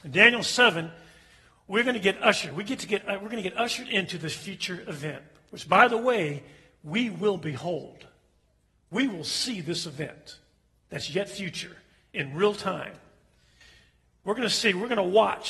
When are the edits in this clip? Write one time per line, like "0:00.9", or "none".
none